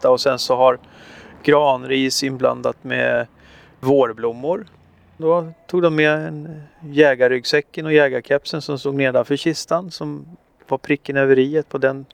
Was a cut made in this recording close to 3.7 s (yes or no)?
no